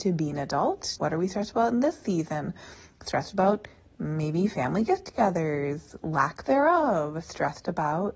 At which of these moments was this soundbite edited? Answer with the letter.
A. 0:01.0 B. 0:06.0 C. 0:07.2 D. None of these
A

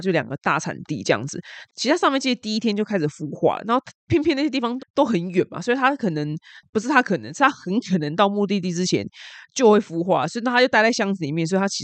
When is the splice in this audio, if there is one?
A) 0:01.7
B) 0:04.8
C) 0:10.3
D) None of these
B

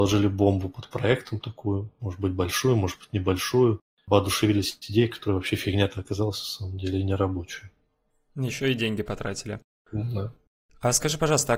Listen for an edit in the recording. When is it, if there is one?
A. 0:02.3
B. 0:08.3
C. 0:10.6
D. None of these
D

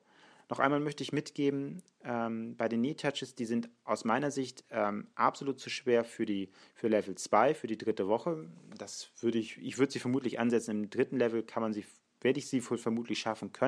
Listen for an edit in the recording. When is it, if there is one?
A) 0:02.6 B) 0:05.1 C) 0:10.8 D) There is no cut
D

